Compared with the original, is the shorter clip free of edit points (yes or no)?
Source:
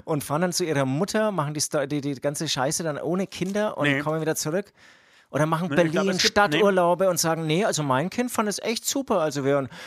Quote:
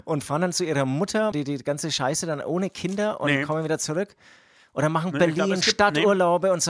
no